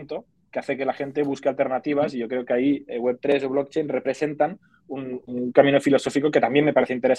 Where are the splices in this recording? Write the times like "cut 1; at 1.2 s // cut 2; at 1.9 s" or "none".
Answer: cut 1; at 5.2 s